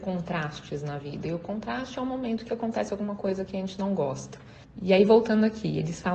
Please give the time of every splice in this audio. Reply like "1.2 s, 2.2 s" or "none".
none